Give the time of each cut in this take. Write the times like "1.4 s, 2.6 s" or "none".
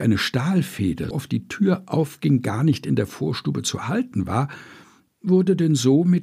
1.1 s